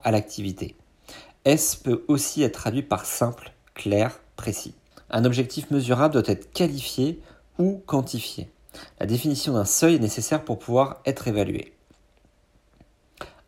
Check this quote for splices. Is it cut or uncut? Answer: cut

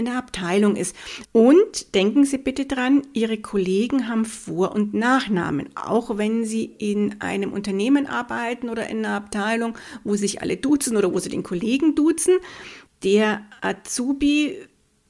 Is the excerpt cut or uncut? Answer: cut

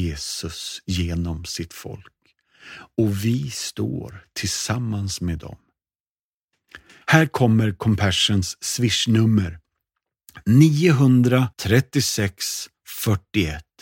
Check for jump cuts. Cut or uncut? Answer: cut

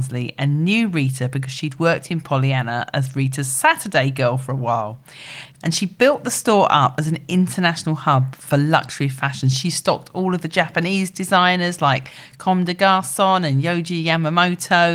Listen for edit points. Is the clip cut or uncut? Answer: cut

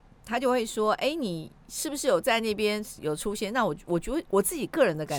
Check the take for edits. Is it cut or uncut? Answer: cut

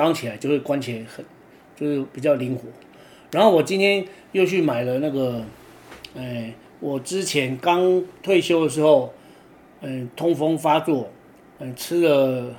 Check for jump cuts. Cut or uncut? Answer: uncut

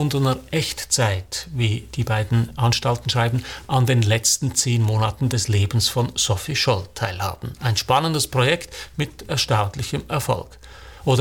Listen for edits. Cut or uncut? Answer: uncut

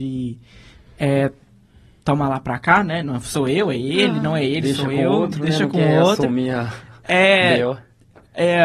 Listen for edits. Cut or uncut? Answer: uncut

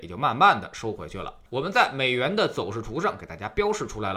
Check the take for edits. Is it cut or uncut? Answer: cut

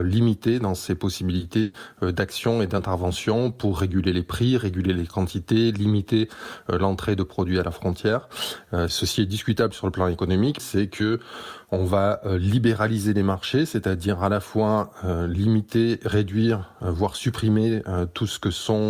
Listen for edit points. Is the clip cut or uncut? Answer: cut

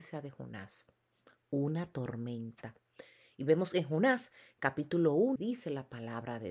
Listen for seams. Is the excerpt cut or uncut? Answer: cut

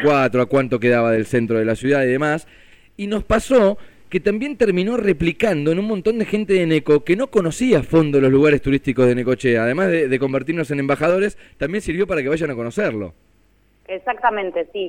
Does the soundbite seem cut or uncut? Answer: uncut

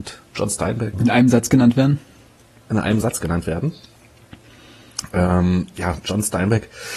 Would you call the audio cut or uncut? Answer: cut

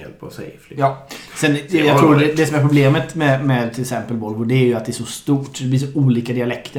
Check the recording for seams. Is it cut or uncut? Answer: uncut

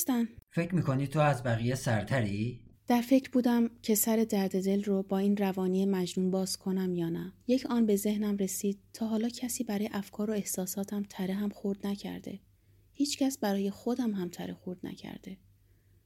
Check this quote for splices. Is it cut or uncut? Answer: cut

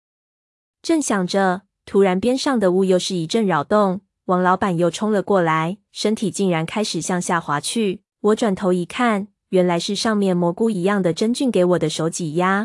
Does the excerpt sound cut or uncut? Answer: cut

